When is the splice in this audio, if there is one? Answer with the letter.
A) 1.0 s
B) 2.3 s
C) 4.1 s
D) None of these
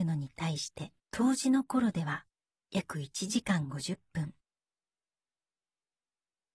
A